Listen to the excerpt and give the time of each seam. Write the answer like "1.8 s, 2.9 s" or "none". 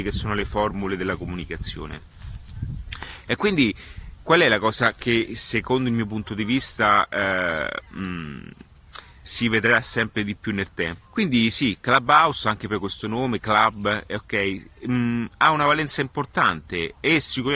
9.2 s, 11.0 s